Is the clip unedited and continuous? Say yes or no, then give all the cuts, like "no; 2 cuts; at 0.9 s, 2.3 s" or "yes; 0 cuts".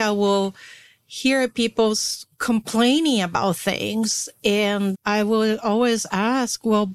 no; 1 cut; at 4.9 s